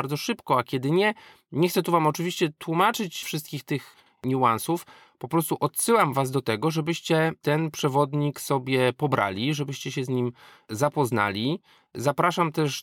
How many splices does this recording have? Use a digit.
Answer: 0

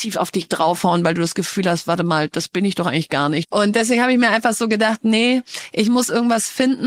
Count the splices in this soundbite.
1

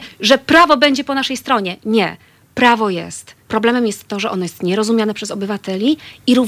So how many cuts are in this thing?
1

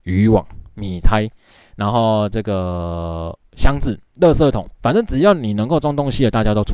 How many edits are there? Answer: 1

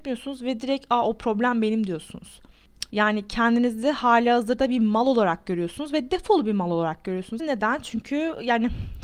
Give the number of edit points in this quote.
2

